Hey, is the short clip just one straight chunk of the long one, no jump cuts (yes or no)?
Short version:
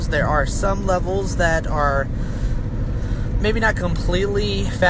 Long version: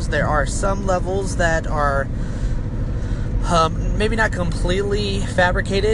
no